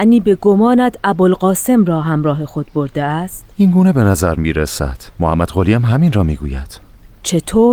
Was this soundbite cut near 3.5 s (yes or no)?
yes